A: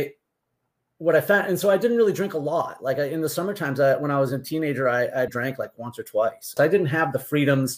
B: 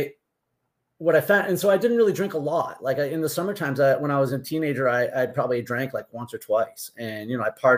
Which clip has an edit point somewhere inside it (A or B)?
A